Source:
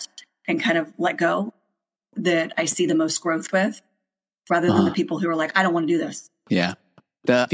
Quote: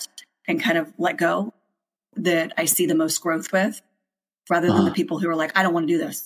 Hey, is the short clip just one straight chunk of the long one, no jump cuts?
yes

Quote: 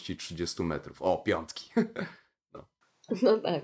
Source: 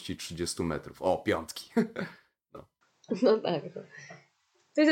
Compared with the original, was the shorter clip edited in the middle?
no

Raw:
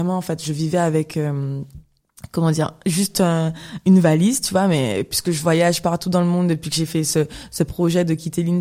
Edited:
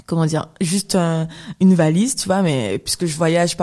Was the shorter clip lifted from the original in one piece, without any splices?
yes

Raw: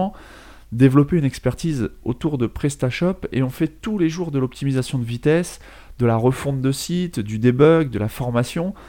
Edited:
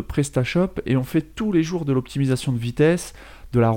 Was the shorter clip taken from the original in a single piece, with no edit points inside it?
yes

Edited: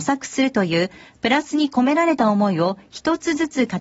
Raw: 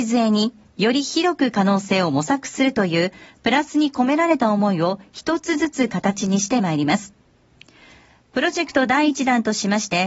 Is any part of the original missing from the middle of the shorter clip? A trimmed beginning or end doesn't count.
no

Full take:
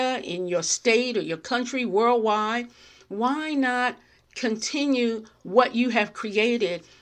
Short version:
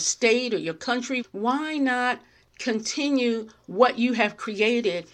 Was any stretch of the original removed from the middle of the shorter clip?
yes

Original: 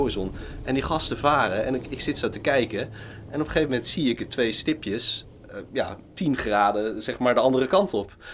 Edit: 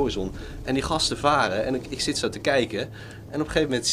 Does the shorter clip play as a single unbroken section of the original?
yes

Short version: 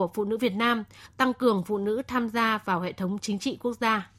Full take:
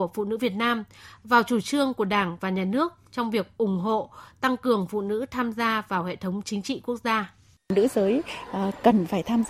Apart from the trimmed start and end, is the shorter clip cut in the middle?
yes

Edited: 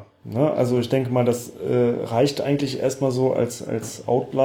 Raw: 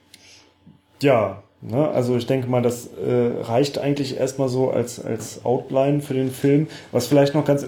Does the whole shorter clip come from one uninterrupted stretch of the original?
yes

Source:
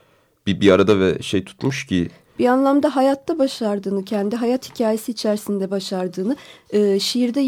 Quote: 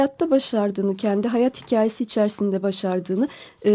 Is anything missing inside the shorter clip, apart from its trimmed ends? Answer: no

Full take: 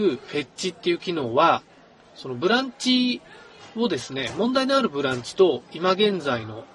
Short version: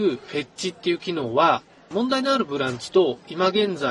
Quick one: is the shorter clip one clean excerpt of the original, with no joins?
no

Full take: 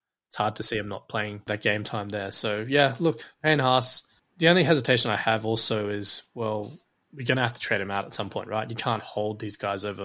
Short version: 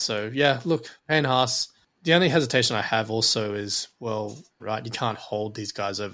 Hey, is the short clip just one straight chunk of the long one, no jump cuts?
no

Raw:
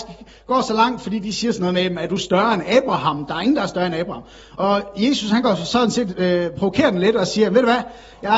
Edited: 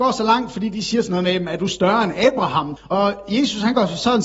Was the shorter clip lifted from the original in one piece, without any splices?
no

